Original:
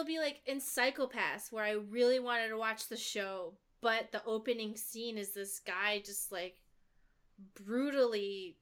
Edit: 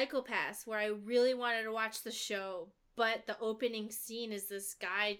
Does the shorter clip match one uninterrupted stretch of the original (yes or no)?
yes